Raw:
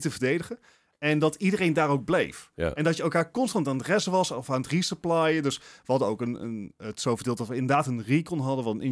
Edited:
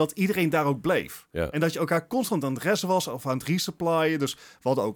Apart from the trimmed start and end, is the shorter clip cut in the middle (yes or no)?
no